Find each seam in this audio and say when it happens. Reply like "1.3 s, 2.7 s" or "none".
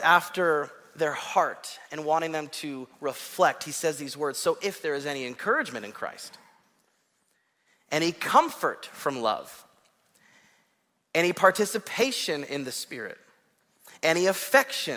none